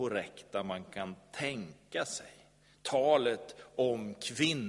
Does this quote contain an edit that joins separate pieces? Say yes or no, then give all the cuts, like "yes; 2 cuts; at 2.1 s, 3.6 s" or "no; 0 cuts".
no; 0 cuts